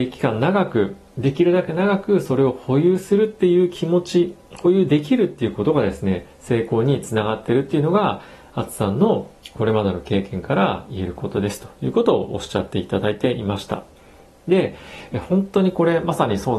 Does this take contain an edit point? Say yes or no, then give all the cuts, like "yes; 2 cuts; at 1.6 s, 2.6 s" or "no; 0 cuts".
no; 0 cuts